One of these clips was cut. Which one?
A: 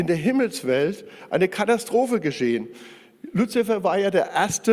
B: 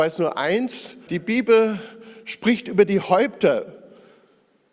B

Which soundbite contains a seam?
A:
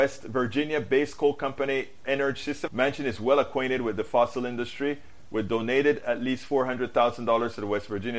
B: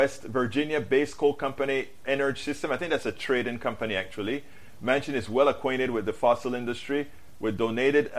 A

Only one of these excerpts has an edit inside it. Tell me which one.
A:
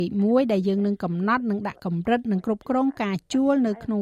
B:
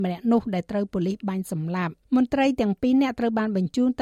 B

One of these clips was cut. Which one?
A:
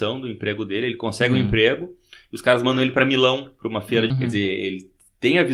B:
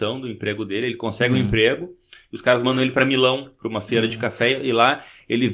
A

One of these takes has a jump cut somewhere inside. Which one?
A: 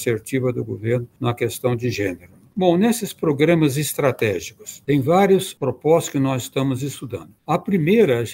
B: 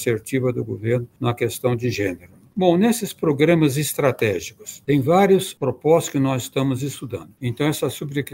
B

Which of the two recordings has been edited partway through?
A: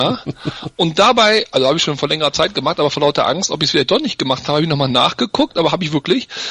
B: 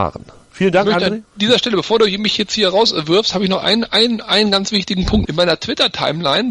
B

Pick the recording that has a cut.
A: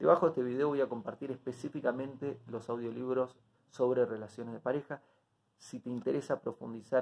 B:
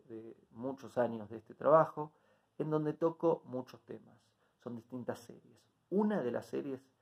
A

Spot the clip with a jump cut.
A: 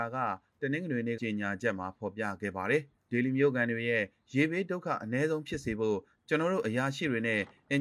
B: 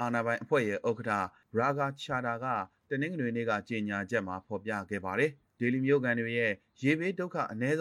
A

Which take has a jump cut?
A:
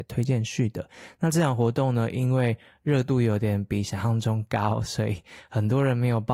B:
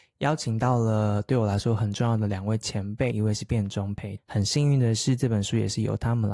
B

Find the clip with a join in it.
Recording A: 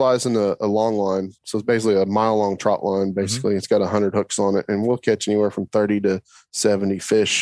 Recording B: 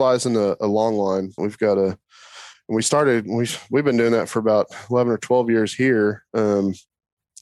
B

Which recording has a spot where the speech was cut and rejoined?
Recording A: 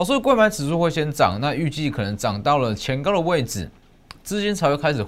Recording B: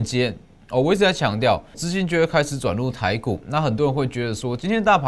B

